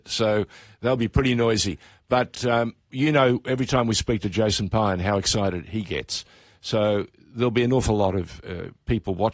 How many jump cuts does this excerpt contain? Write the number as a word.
zero